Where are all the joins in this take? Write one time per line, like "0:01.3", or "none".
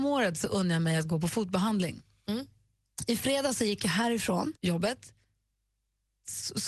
0:04.6